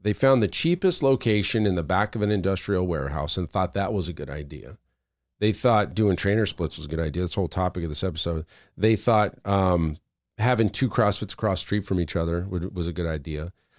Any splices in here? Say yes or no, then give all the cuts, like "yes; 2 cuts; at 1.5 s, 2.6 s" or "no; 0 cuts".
no; 0 cuts